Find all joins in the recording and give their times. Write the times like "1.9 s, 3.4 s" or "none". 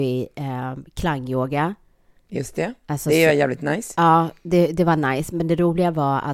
none